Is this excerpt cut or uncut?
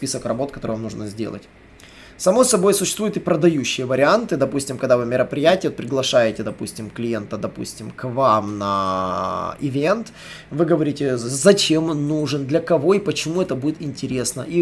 uncut